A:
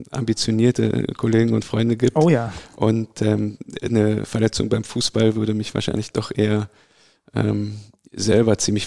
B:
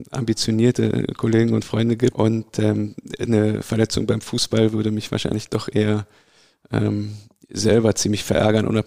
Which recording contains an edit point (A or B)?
B